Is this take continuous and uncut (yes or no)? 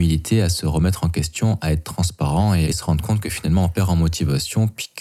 no